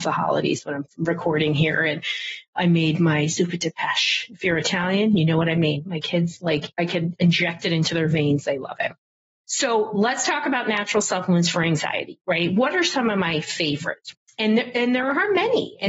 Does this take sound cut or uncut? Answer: uncut